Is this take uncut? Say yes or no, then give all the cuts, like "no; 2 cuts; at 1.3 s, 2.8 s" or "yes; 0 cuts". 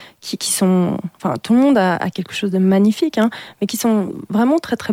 yes; 0 cuts